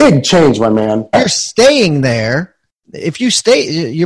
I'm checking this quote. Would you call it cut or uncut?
cut